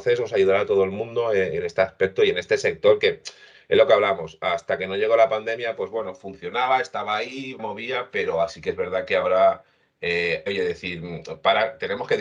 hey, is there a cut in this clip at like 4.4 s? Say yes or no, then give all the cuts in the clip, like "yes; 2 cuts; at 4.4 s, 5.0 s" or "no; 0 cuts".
no; 2 cuts; at 7.6 s, 10.5 s